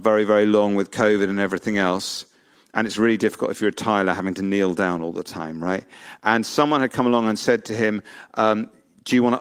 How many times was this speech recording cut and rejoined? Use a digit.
0